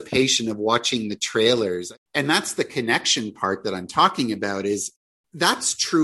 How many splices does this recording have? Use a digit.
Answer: 1